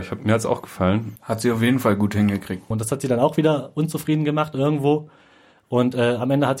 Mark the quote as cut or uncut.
cut